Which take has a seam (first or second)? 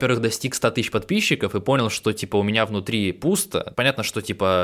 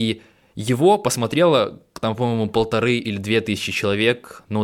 first